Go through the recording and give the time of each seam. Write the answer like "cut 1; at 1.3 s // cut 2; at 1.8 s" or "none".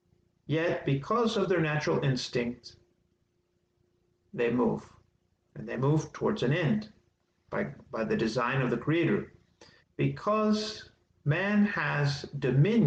cut 1; at 9.8 s